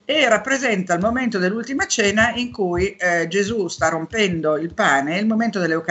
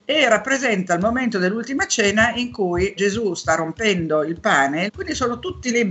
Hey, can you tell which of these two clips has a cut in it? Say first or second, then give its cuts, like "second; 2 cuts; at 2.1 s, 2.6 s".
second; 2 cuts; at 3.0 s, 4.9 s